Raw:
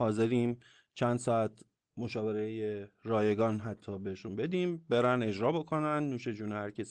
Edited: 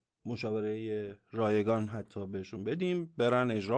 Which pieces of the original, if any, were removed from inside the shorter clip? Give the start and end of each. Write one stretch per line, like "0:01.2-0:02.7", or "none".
none